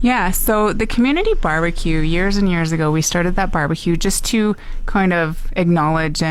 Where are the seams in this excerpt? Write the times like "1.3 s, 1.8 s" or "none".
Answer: none

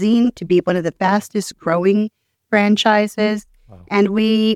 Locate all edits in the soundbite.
none

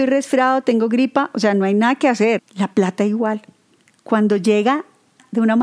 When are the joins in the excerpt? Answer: 2.4 s

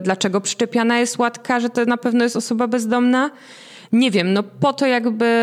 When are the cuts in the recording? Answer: none

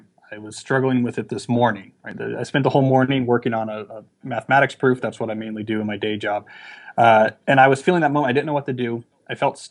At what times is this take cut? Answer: none

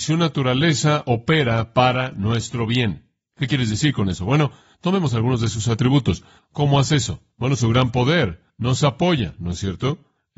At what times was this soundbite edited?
6.4 s

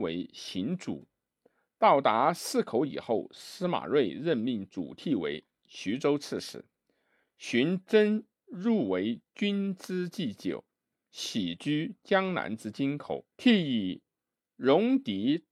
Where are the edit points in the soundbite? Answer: 13.3 s

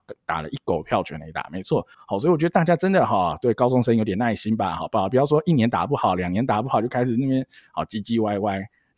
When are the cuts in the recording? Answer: 1.9 s

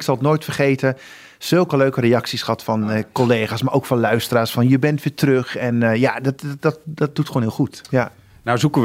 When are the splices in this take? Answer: none

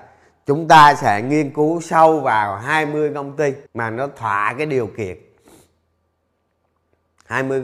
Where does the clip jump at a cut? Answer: 3.7 s

